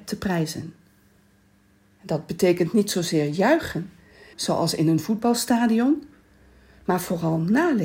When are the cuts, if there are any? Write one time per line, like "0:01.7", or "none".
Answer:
0:04.3